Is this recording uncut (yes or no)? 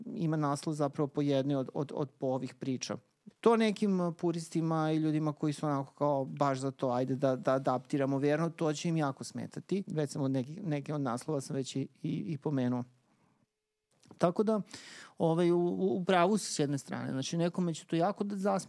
no